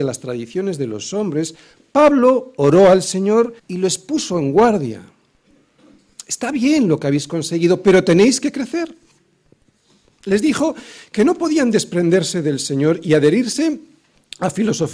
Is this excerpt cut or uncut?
cut